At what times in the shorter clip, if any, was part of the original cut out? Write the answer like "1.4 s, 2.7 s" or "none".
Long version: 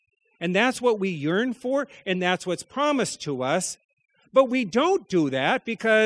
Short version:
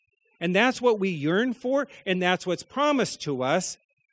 none